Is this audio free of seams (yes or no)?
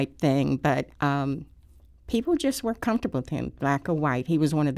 no